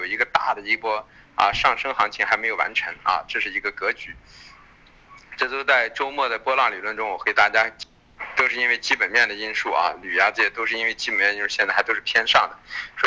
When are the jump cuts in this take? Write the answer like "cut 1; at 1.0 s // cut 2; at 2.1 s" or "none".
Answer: none